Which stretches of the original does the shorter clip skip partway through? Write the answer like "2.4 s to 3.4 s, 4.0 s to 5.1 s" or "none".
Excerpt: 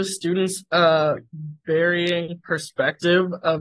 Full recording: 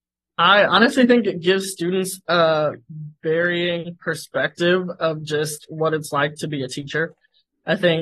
none